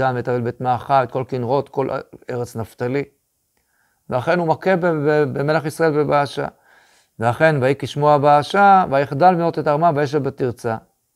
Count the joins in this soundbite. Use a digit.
0